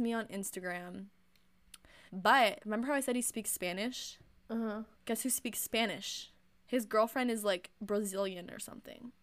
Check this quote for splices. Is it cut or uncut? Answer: cut